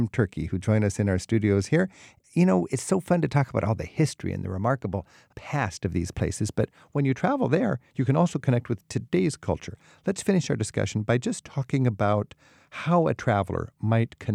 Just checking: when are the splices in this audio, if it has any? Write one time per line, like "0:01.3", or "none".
none